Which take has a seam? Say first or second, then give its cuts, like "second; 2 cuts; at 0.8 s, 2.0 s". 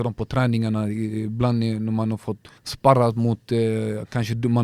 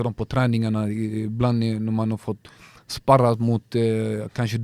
first; 1 cut; at 2.6 s